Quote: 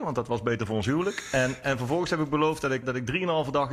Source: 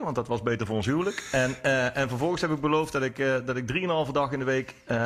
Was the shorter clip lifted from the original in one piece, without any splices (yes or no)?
no